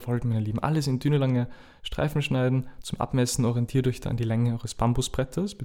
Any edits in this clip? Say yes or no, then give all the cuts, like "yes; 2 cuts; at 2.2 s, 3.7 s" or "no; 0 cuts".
no; 0 cuts